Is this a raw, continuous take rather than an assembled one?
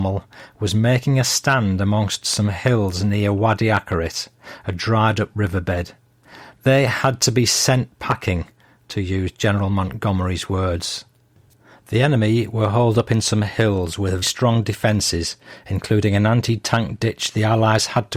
no; 1 cut; at 14.2 s

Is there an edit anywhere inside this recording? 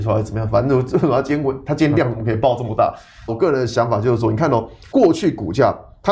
yes; 2 cuts; at 3.3 s, 4.9 s

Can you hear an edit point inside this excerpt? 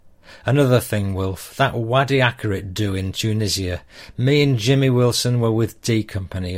no; 0 cuts

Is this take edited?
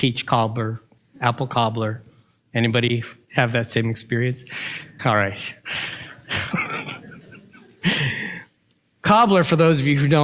yes; 2 cuts; at 5.0 s, 6.5 s

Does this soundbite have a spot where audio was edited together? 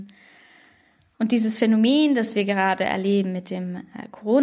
yes; 1 cut; at 1.1 s

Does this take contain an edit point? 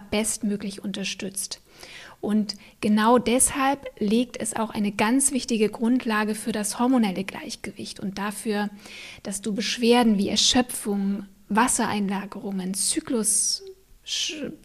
no; 0 cuts

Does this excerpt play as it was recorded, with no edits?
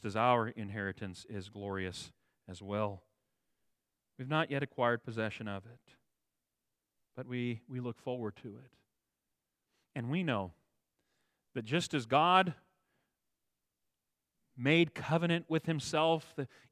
yes; 0 cuts

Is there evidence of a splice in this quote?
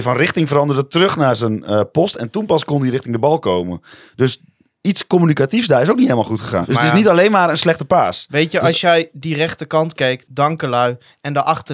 yes; 2 cuts; at 6.6 s, 10.2 s

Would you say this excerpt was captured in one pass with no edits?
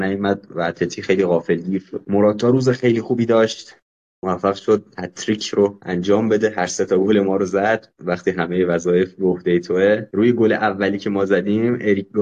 yes; 0 cuts

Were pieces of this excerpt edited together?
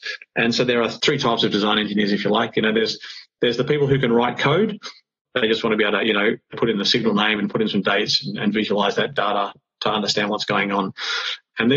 yes; 2 cuts; at 5.2 s, 6.5 s

